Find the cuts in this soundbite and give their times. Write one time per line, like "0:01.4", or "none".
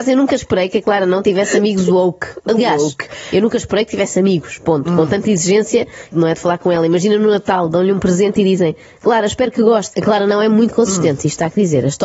0:06.1
0:09.9